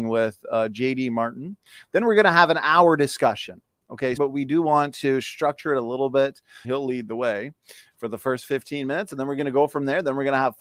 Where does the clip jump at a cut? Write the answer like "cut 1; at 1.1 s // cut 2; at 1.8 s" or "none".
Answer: cut 1; at 4.2 s // cut 2; at 6.6 s